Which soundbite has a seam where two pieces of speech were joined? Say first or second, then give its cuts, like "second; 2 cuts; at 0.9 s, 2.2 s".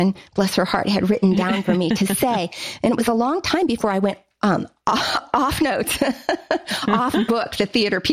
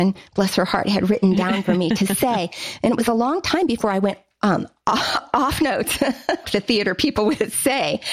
second; 1 cut; at 6.4 s